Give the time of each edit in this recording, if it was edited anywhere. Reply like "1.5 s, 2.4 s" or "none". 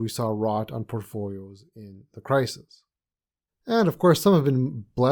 3.5 s